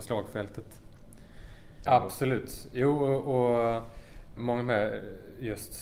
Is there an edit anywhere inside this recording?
yes; 2 cuts; at 1.9 s, 4.4 s

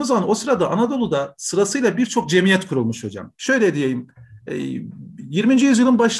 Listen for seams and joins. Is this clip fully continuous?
no; 1 cut; at 3.3 s

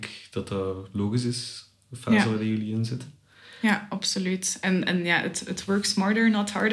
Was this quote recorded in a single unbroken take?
yes; 0 cuts

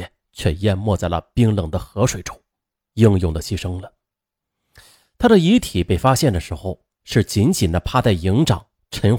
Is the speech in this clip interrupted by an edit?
yes; 1 cut; at 2.9 s

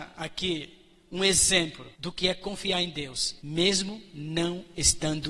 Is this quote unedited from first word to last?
no; 2 cuts; at 1.9 s, 3.4 s

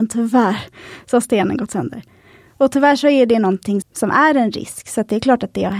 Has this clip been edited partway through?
yes; 1 cut; at 3.8 s

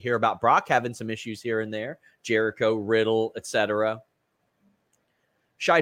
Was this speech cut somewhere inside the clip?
no; 0 cuts

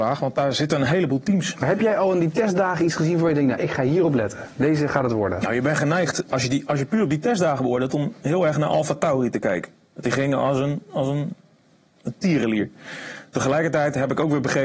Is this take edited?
no; 0 cuts

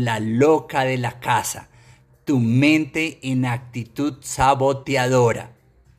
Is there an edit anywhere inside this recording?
no; 0 cuts

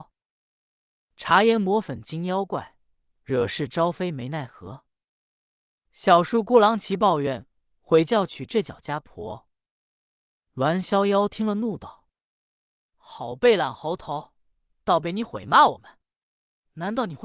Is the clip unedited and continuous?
yes; 0 cuts

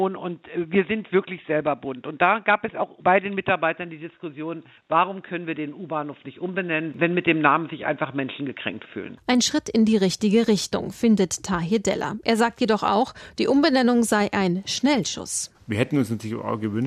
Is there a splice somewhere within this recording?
no; 0 cuts

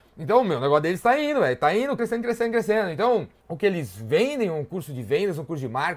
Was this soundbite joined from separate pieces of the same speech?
yes; 2 cuts; at 2.0 s, 3.4 s

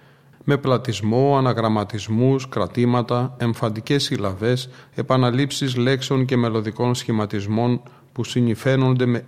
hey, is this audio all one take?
yes; 0 cuts

